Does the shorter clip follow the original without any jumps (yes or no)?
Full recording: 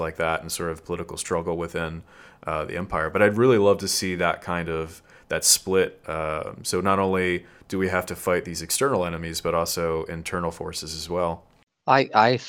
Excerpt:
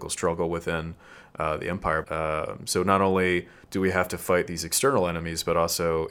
no